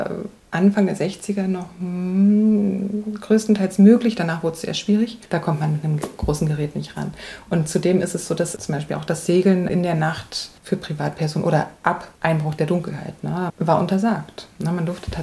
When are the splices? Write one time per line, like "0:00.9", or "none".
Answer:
0:05.2
0:13.5